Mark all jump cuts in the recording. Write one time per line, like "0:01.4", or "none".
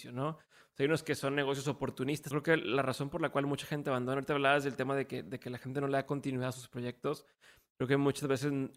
0:02.3